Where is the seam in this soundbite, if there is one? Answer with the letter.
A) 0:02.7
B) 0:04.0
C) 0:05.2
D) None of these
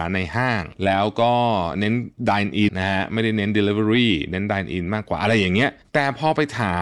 A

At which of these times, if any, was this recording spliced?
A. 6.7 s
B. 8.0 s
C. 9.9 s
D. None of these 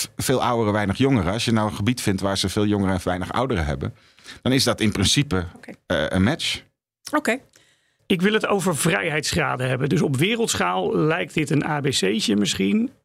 B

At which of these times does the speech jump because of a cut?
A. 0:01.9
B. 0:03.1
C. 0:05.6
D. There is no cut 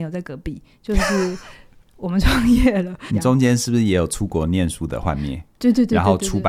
B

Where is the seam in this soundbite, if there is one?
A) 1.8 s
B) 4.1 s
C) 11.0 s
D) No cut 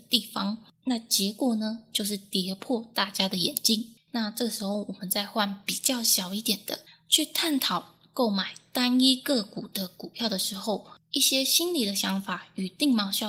B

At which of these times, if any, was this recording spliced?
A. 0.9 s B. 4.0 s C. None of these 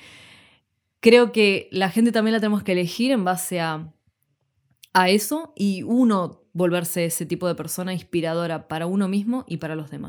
C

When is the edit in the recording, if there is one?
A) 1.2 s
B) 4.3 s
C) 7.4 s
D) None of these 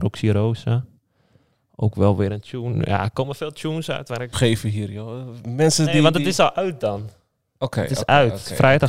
B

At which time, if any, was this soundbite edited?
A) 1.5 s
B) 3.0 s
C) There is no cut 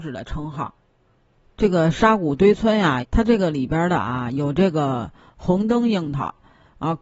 B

